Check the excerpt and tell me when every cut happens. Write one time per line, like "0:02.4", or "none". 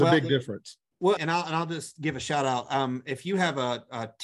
0:01.2